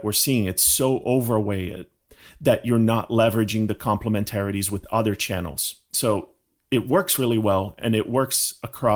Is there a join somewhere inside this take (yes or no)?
no